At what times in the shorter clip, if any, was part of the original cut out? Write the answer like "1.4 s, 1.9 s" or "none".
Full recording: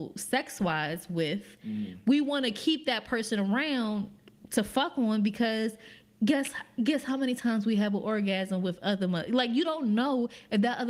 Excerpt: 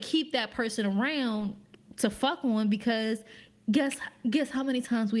none